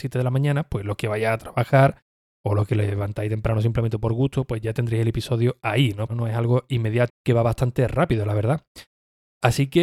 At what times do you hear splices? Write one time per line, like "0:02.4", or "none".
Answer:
0:06.1
0:07.1